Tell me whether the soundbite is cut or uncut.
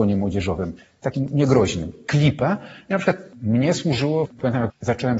uncut